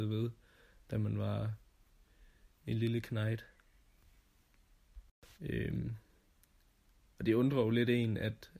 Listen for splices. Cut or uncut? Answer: cut